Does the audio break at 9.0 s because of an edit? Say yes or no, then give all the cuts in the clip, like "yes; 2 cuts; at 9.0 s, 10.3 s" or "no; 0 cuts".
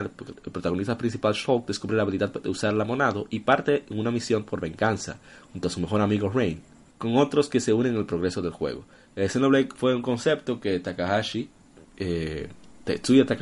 no; 1 cut; at 6.9 s